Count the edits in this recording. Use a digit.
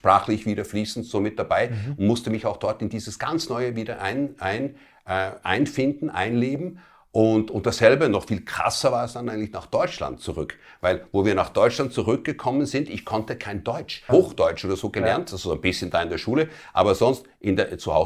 1